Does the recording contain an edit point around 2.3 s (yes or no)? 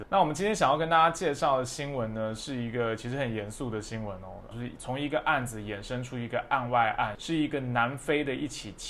no